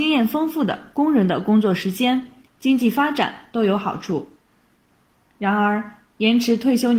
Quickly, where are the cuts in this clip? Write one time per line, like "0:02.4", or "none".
0:02.5

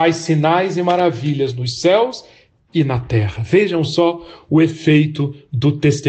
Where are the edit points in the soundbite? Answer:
none

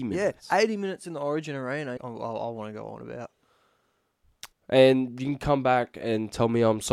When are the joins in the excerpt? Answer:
0:02.0
0:04.5

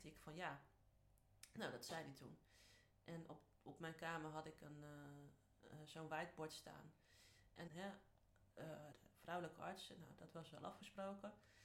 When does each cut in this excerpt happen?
0:07.7
0:08.9

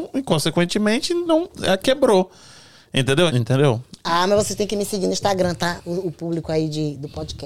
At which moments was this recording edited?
0:03.3

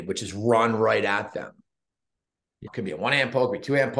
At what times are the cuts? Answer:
0:02.7

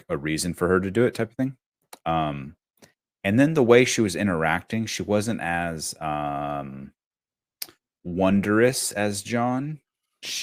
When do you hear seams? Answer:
none

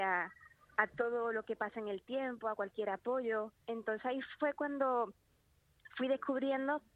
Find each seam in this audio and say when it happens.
0:03.6

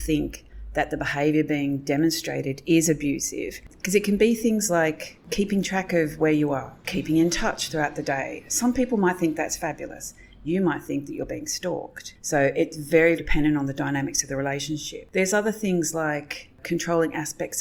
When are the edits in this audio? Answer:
0:13.2

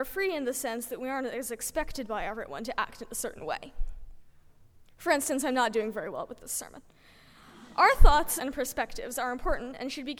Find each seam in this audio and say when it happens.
0:08.4

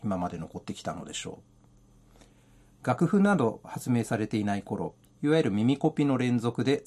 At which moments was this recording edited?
0:05.0

